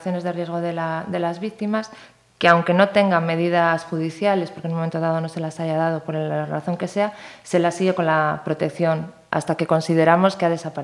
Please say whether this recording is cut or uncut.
uncut